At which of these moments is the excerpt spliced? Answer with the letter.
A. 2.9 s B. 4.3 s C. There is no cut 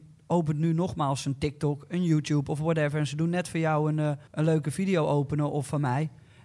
B